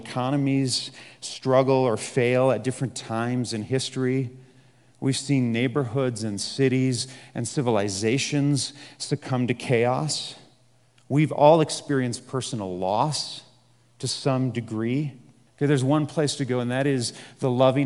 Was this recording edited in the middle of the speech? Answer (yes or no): yes